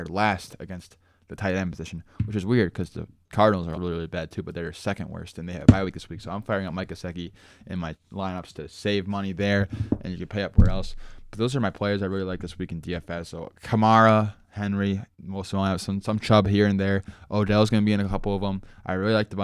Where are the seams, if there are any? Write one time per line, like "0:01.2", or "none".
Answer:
0:03.7